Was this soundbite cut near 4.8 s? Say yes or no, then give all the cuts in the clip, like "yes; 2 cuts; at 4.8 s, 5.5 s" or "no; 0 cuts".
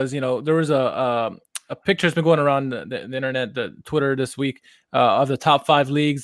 no; 0 cuts